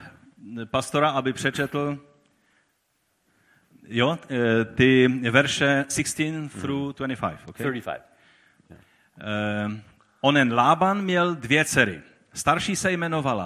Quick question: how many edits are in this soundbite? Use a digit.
0